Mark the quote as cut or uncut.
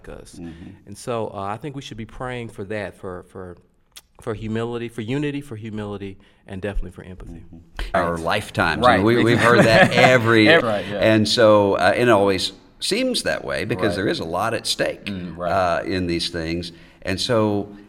cut